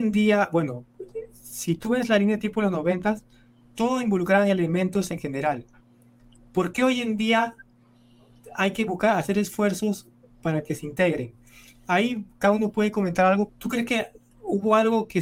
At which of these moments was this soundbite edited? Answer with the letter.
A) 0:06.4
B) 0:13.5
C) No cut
B